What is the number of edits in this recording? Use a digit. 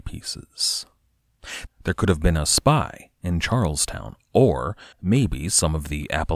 2